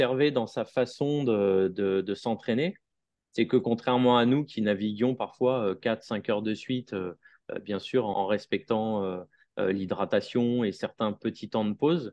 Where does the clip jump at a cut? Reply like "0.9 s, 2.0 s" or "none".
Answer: 8.1 s